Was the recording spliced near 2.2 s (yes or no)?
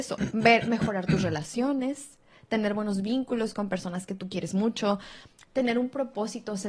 no